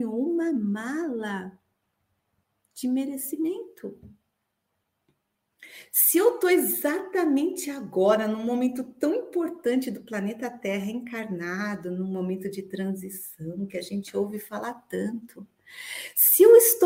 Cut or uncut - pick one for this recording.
uncut